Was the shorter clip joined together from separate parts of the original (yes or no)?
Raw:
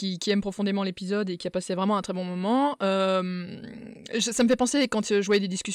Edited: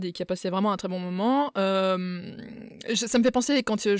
no